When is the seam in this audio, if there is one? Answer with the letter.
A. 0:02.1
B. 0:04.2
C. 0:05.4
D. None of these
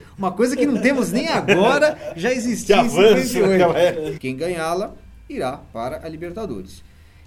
B